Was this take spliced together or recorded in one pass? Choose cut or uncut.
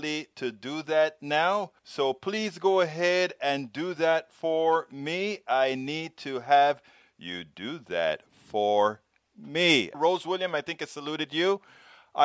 cut